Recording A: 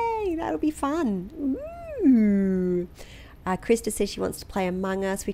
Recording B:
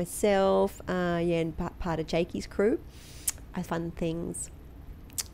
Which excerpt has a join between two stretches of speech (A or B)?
B